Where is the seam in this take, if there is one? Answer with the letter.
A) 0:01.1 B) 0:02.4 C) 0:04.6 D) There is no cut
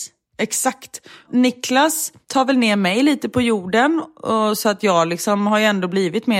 D